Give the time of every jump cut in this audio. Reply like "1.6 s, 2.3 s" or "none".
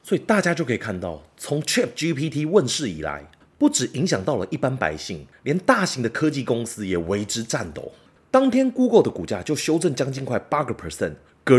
8.2 s